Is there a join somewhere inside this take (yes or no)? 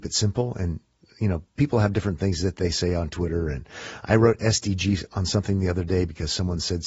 no